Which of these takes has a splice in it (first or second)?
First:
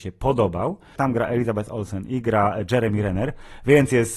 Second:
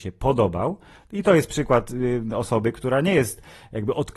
first